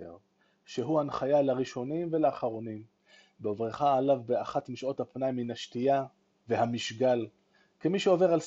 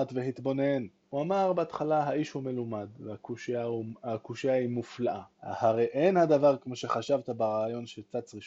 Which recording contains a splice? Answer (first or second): second